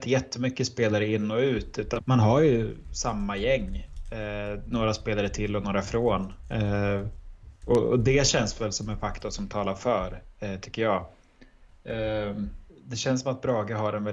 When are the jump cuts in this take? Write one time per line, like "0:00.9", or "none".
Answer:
0:02.0
0:12.7

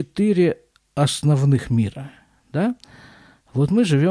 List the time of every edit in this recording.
none

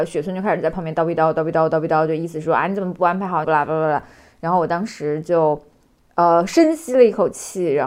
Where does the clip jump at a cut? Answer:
0:03.4

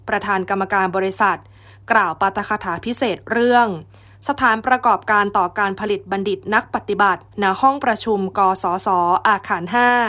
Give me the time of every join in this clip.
0:07.3

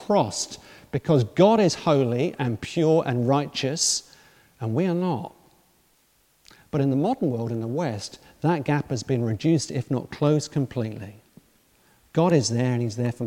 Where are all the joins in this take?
none

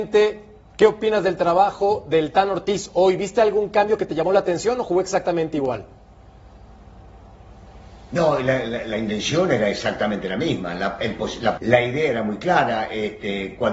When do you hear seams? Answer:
0:11.6

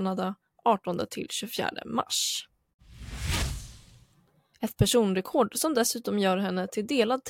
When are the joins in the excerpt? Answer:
0:04.5

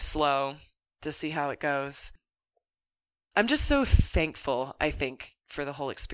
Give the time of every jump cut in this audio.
none

